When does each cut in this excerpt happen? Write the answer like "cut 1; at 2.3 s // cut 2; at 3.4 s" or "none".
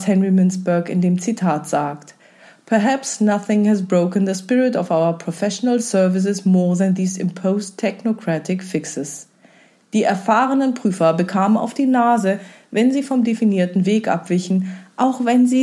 none